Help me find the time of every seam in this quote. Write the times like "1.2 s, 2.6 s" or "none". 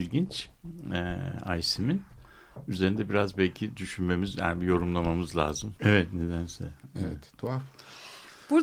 5.8 s